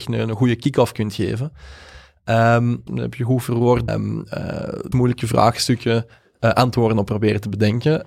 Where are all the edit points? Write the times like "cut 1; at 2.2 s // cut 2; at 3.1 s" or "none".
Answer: cut 1; at 2.9 s // cut 2; at 3.9 s // cut 3; at 4.9 s